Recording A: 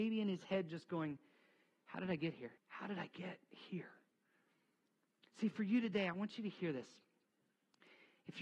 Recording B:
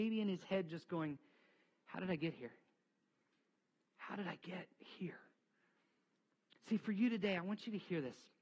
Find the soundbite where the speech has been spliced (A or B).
A